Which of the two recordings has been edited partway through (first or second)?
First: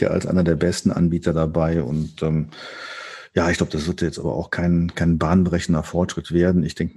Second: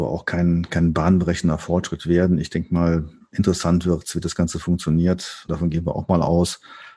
second